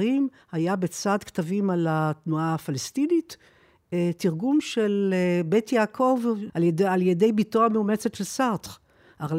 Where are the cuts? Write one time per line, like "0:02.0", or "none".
0:06.5

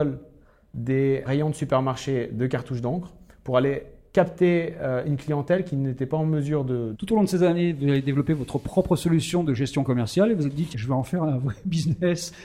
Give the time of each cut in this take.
0:01.2
0:06.9
0:10.7

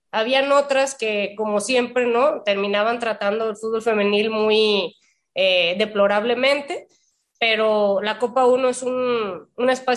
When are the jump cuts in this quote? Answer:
none

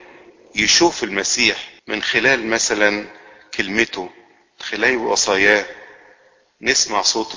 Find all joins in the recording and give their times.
0:01.8

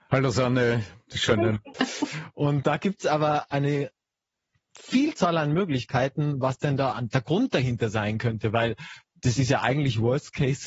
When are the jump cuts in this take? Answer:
0:01.7
0:06.9

